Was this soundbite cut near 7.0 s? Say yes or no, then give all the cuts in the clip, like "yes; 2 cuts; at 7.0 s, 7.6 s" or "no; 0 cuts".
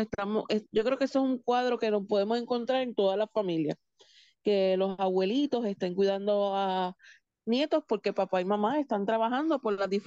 no; 0 cuts